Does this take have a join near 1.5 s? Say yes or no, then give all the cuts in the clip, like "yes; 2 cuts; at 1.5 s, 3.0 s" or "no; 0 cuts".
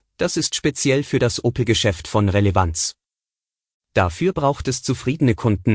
no; 1 cut; at 3.8 s